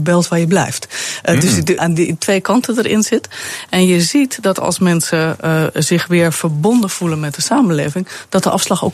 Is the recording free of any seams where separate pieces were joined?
no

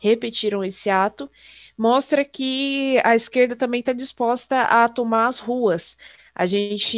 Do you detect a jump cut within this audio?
no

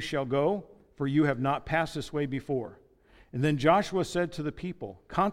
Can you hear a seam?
no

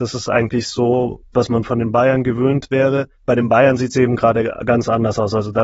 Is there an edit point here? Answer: yes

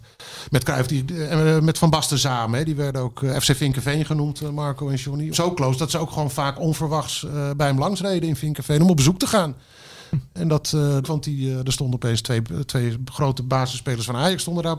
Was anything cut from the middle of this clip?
yes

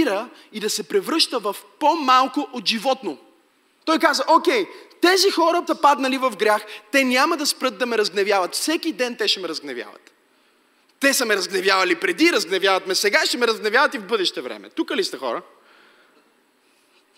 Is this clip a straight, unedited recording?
no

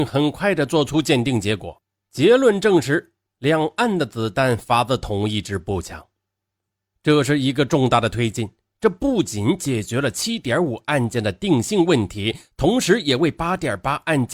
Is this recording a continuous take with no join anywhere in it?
yes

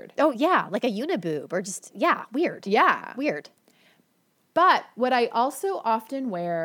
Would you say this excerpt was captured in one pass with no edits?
yes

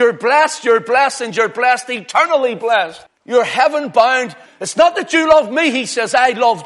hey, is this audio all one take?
no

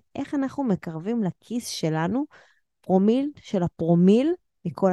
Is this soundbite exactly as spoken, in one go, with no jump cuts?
yes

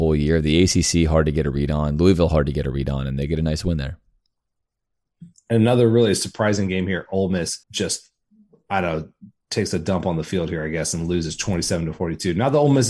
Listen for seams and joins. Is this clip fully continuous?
no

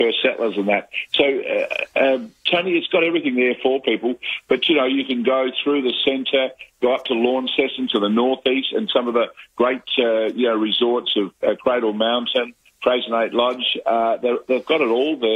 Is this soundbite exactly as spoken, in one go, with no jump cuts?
yes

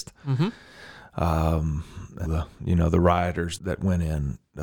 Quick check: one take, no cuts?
no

